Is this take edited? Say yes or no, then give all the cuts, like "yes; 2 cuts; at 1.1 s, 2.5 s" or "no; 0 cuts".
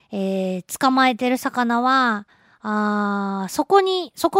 no; 0 cuts